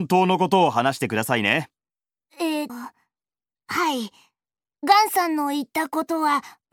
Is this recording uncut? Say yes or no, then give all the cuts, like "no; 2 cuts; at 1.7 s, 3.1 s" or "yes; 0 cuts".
no; 1 cut; at 2.7 s